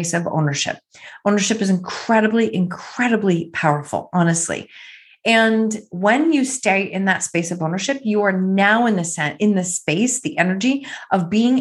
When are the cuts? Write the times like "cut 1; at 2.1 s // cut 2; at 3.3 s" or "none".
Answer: none